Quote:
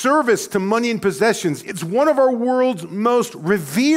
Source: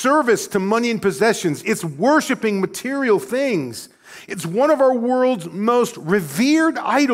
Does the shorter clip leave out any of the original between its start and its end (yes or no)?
yes